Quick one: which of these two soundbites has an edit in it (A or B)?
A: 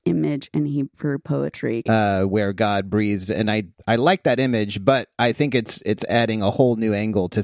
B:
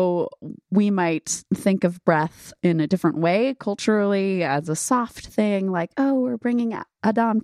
A